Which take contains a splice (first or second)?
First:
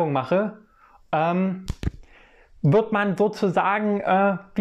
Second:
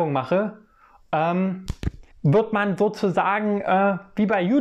second